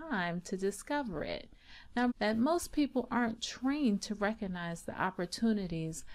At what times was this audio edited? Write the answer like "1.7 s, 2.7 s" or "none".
2.1 s